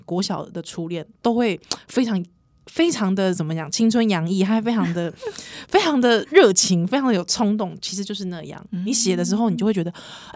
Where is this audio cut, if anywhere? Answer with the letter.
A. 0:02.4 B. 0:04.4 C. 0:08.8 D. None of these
D